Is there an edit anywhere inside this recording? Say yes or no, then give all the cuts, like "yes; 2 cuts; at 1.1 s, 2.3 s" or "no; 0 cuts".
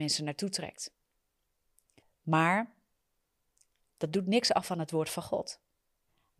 yes; 1 cut; at 2.0 s